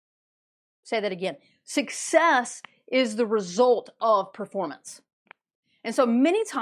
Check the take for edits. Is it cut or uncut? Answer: uncut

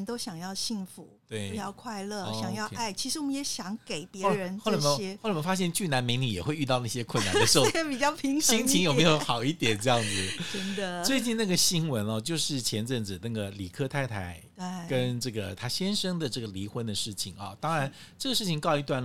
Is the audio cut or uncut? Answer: uncut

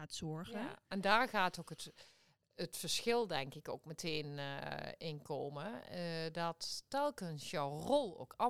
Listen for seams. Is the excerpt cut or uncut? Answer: uncut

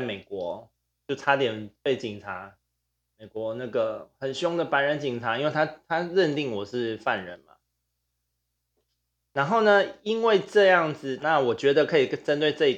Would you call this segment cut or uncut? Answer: cut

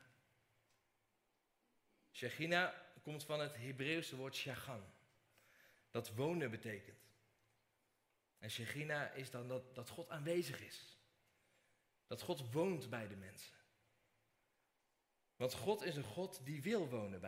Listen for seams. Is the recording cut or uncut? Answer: uncut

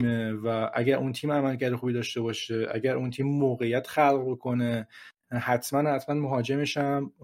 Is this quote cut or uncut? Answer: uncut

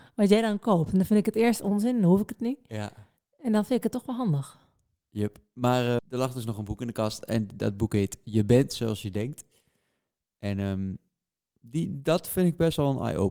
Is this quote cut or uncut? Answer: cut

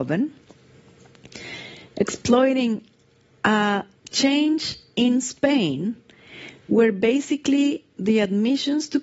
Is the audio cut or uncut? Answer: uncut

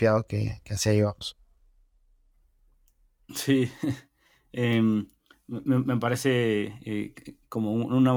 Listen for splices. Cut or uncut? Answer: uncut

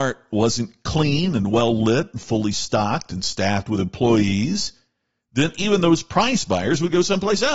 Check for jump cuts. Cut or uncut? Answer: uncut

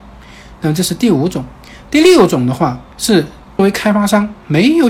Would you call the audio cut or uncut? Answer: uncut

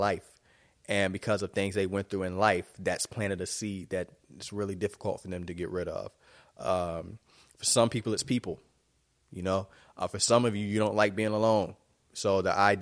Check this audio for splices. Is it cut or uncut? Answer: uncut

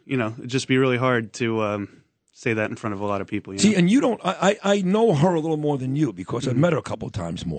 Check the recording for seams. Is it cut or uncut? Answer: uncut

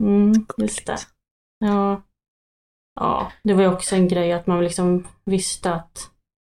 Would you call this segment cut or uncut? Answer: uncut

